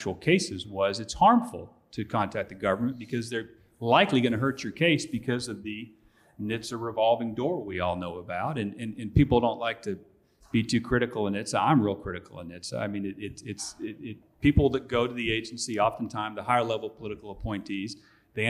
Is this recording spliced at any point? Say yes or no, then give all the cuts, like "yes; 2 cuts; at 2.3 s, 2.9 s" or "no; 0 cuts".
no; 0 cuts